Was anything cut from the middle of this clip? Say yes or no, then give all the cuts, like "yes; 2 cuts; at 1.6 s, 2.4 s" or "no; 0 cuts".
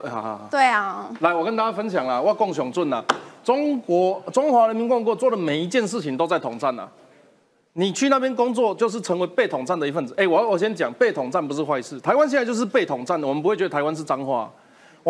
no; 0 cuts